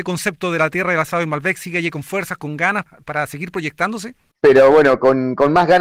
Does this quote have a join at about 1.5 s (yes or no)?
no